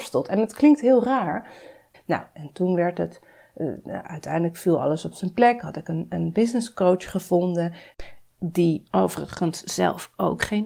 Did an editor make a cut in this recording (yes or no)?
yes